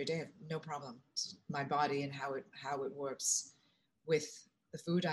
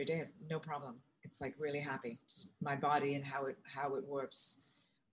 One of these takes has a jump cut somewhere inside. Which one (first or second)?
first